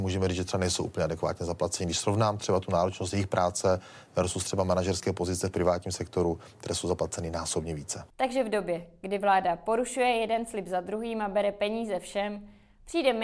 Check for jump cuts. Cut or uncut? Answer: uncut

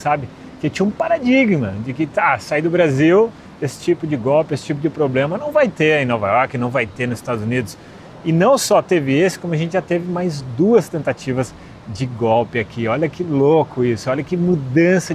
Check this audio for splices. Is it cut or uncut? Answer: uncut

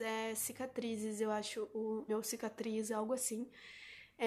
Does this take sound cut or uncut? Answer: cut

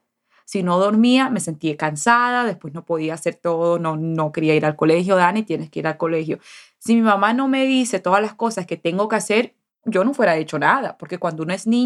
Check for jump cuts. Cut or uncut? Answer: uncut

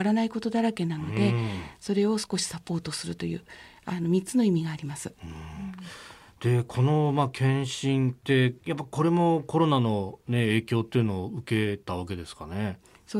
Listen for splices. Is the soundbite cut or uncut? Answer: uncut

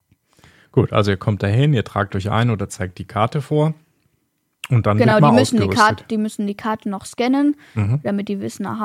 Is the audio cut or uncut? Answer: uncut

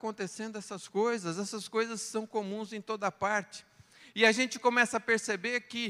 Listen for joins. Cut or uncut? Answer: uncut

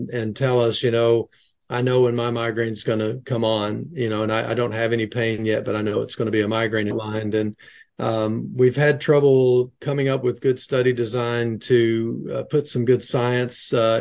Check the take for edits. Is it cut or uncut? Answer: cut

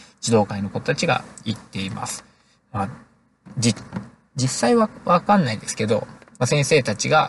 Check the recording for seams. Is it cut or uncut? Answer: cut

